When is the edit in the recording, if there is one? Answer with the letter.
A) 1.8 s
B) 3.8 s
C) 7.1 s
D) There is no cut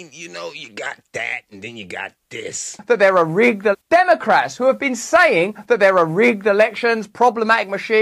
B